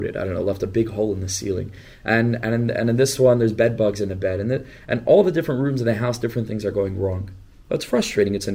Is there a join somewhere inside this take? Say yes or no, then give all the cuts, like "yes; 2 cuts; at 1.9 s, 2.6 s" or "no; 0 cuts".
no; 0 cuts